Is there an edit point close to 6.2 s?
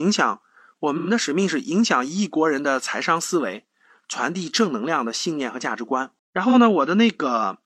yes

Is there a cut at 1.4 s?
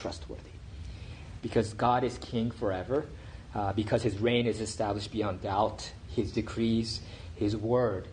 yes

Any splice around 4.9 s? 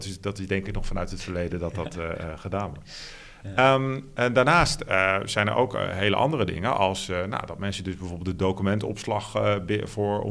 no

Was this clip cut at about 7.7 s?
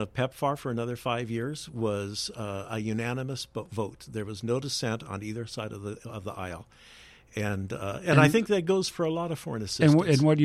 no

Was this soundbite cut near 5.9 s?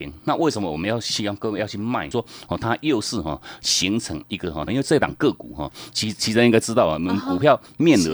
yes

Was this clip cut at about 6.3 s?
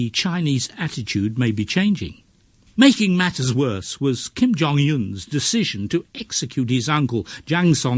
no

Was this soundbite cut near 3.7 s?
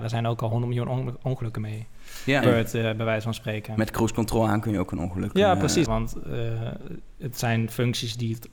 no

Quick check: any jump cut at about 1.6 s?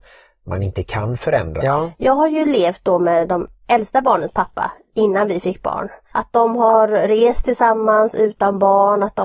yes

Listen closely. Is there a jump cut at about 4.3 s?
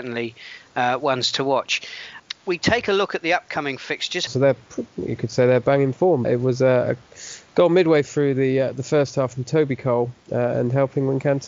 yes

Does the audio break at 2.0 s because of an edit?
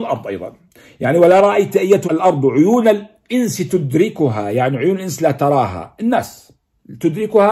yes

